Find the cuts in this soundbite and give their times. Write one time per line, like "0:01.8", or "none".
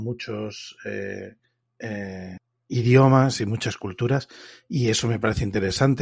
none